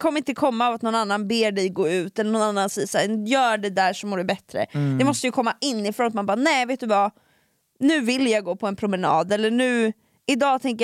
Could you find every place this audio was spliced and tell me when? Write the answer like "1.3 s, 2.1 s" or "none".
none